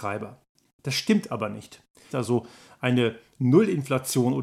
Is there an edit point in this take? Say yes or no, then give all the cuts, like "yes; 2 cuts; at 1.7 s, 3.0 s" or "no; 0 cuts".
yes; 1 cut; at 2.1 s